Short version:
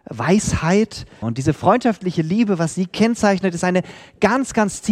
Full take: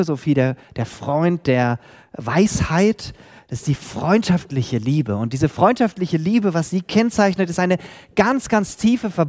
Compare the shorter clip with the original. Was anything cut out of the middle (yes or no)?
yes